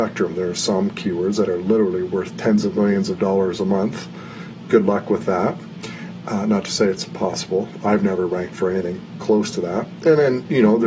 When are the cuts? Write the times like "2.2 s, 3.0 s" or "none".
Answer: none